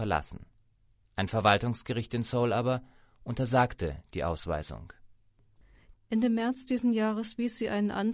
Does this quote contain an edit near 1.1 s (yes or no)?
no